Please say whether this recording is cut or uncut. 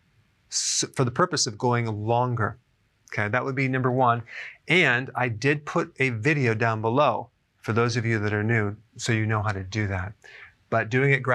uncut